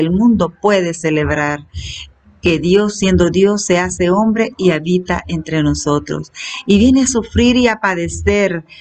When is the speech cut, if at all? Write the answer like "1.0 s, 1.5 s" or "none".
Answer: none